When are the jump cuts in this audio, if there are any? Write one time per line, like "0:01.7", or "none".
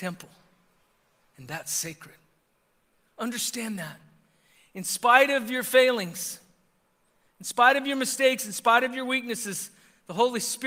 none